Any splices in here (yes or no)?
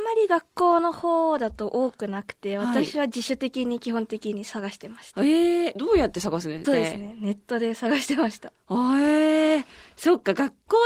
yes